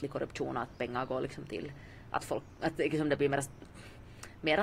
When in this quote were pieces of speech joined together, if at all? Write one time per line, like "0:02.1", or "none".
none